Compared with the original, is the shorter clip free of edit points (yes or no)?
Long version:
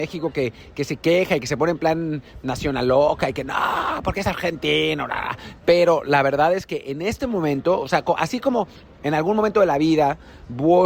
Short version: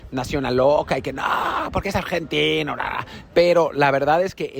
yes